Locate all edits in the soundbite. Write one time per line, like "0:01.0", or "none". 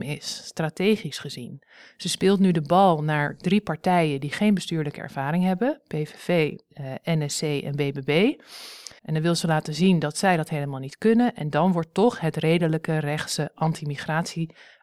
0:09.0